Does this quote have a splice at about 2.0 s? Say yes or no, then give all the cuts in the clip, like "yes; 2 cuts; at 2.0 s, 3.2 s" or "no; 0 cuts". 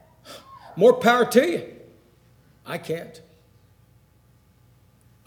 no; 0 cuts